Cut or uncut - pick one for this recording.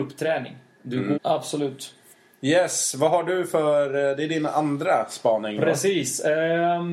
cut